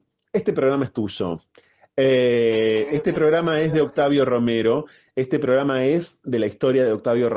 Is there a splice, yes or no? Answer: no